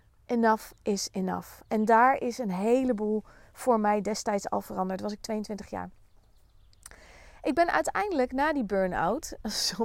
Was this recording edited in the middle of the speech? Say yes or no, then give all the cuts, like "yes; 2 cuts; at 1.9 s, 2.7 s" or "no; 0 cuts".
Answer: no; 0 cuts